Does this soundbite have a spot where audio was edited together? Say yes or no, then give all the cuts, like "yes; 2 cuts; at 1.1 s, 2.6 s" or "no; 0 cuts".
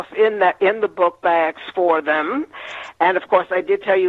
no; 0 cuts